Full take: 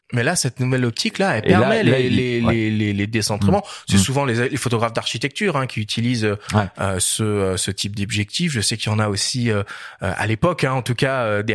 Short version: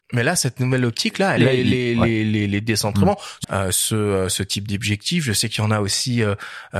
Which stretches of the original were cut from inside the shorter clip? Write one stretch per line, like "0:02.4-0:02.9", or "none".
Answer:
0:01.4-0:01.8
0:03.9-0:06.7